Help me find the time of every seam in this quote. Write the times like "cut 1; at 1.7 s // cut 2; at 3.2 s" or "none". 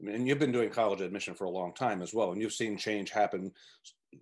none